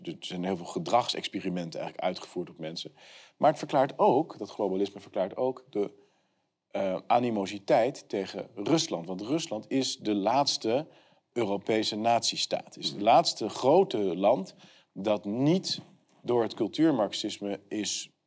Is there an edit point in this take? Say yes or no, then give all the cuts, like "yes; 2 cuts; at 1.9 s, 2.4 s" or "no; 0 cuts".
no; 0 cuts